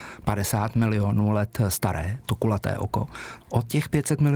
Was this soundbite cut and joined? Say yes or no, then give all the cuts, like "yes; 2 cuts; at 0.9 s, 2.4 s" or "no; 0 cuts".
yes; 2 cuts; at 2.2 s, 3.4 s